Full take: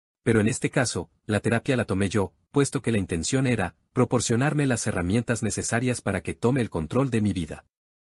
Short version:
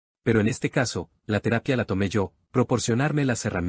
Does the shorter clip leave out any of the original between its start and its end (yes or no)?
yes